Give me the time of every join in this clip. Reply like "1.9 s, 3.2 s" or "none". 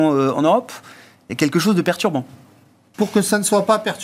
2.9 s